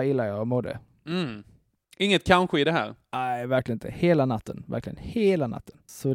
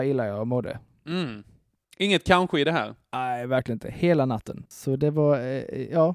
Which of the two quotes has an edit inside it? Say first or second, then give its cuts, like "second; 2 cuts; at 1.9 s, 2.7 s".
second; 1 cut; at 4.6 s